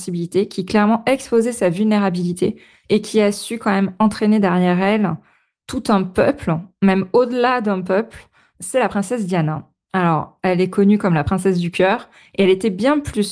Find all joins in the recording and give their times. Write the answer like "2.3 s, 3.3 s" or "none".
none